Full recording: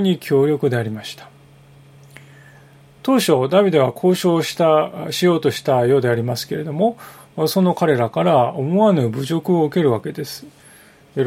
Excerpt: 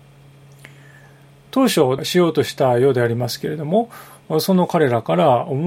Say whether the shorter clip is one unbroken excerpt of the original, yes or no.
no